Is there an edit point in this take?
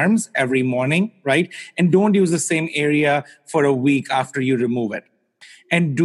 no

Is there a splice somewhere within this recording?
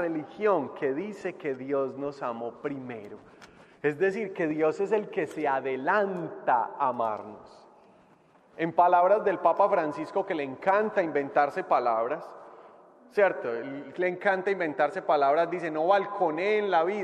no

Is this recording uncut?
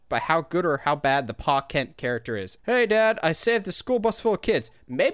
no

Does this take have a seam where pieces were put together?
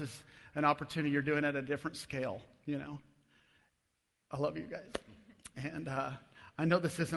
no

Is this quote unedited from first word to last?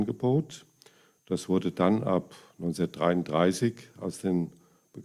yes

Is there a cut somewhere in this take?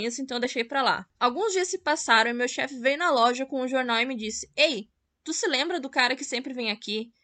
no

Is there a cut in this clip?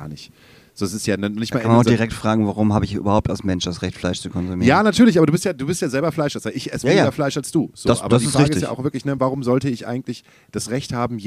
no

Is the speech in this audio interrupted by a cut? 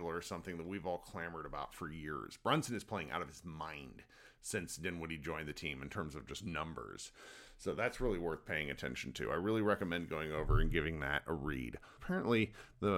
yes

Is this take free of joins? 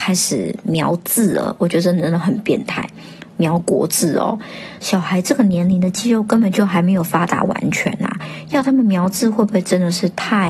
no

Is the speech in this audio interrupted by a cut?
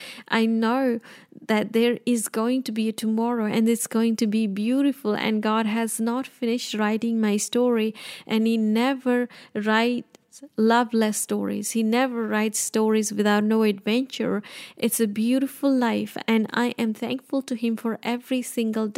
no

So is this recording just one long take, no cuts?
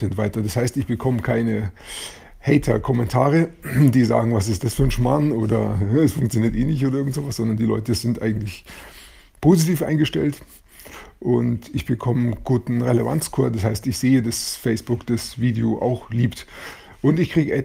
yes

